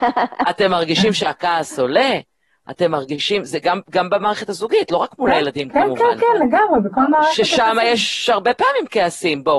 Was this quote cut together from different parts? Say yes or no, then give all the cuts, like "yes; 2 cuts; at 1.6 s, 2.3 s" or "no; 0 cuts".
no; 0 cuts